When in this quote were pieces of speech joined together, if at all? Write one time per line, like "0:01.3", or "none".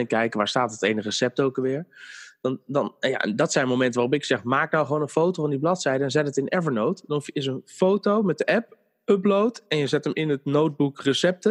none

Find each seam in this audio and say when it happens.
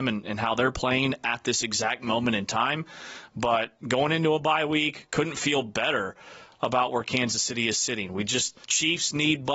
0:08.6

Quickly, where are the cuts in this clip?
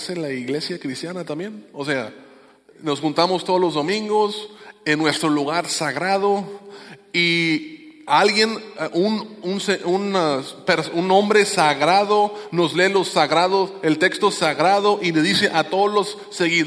none

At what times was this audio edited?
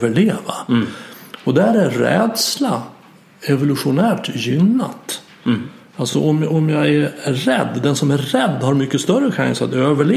none

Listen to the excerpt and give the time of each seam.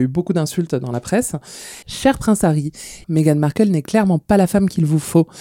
0:01.8
0:03.0

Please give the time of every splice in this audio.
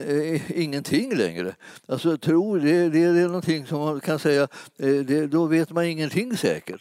none

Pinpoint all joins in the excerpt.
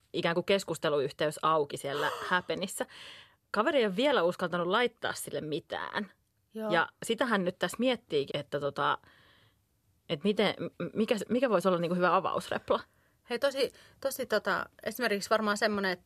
0:08.3

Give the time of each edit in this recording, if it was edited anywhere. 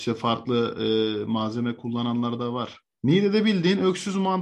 0:02.9

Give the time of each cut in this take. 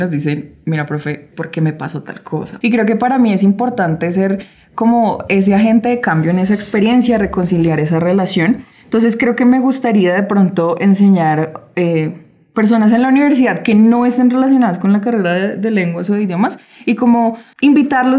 0:01.3
0:02.6

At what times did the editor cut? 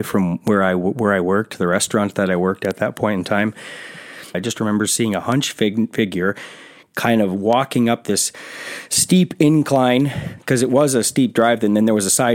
0:04.3

